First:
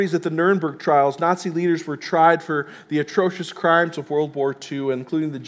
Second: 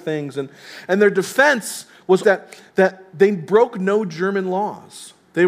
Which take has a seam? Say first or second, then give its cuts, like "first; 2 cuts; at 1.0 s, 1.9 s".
second; 1 cut; at 2.2 s